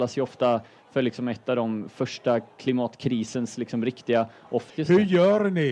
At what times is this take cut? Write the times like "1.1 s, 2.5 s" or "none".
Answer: 4.7 s